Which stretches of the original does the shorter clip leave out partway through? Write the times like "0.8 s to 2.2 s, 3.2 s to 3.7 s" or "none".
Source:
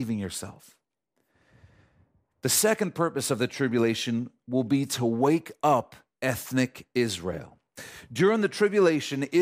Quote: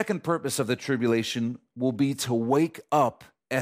none